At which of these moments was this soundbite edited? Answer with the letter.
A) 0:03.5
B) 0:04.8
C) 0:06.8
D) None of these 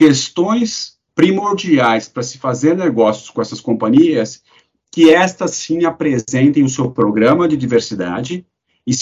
D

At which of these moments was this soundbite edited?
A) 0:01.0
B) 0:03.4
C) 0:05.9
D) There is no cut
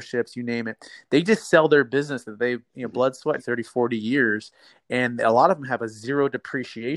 B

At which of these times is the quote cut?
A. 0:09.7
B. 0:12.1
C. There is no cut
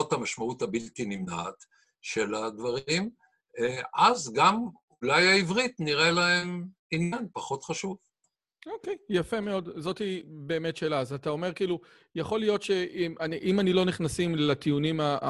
C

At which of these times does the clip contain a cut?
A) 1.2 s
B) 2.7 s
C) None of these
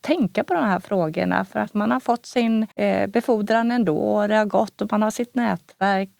B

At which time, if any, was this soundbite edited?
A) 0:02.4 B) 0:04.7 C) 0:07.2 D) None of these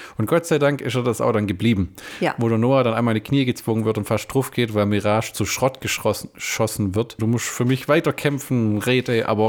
C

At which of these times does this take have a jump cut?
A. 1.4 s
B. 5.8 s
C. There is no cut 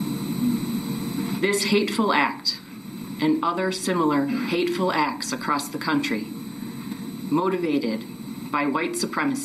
C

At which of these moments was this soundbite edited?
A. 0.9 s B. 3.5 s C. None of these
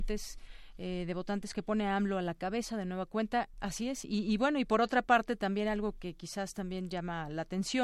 B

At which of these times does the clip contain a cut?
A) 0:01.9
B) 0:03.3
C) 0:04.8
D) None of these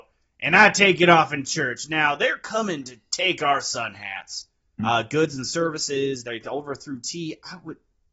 C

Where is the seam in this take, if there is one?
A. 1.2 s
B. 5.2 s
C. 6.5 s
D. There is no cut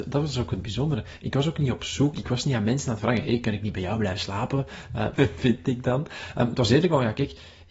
B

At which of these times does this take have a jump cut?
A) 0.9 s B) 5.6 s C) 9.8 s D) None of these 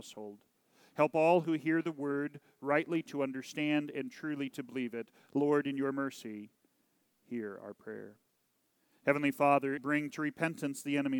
C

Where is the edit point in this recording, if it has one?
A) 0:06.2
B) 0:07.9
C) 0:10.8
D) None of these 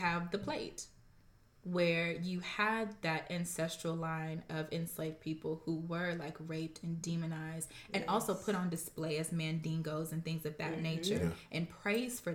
D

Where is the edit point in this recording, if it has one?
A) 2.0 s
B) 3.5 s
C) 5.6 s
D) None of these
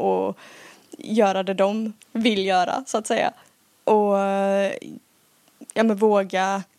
A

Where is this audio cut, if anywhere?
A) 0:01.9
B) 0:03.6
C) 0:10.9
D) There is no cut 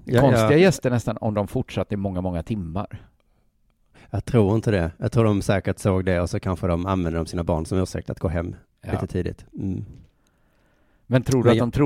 D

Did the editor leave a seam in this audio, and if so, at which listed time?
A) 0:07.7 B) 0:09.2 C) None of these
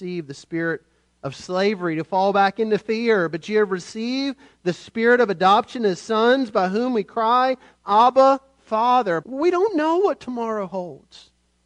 B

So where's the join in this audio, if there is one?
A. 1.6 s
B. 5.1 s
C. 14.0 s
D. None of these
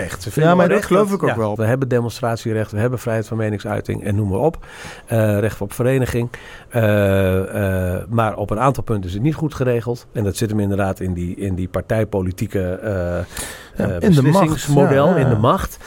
A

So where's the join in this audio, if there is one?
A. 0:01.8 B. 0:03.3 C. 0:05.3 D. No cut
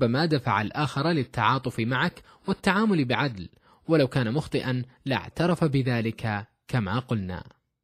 D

